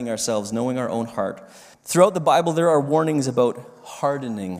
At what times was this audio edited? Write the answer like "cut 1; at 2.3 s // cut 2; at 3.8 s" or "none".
cut 1; at 1.7 s